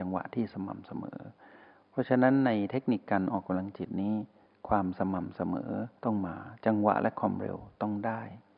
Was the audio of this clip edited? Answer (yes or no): no